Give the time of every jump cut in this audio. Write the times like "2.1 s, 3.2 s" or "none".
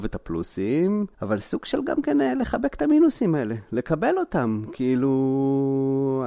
1.1 s